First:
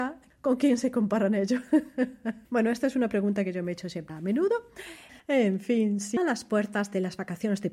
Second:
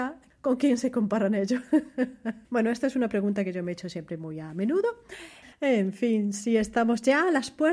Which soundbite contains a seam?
first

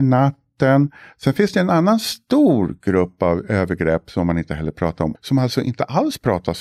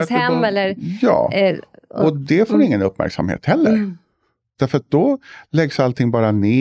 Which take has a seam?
first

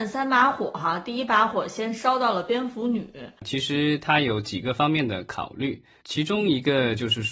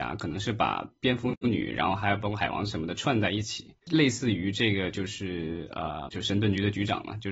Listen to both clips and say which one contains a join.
second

